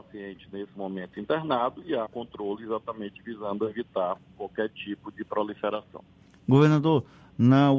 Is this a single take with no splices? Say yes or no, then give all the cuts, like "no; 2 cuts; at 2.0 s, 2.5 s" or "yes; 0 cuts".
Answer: no; 1 cut; at 2.1 s